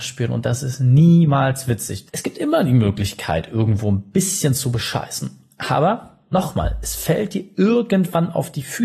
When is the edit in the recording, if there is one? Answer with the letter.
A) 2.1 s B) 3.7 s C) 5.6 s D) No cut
A